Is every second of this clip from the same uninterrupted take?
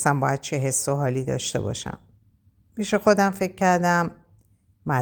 yes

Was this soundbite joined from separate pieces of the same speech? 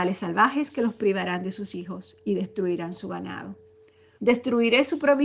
yes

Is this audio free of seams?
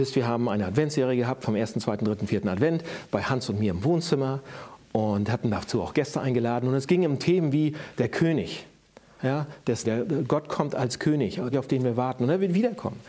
no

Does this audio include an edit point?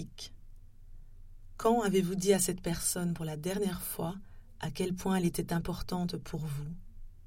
no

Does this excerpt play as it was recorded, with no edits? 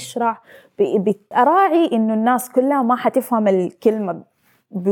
no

